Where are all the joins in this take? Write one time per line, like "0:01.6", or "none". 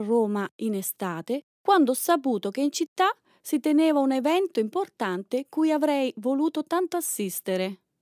0:01.5